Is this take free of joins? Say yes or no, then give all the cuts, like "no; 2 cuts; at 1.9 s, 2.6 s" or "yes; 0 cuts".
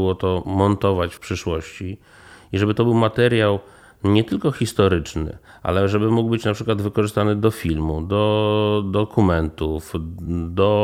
yes; 0 cuts